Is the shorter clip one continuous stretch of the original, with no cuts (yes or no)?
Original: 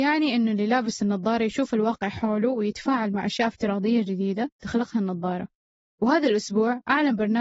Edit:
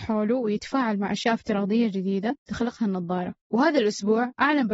no